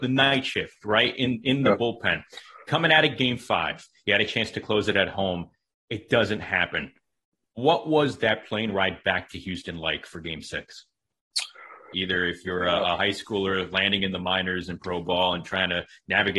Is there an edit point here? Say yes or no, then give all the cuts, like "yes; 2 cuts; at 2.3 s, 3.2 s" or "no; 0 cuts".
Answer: yes; 2 cuts; at 7.4 s, 11.9 s